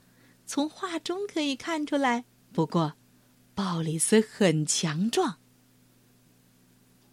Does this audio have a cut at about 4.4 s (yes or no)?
no